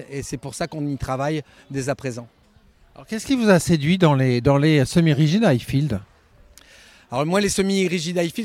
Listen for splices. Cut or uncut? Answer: uncut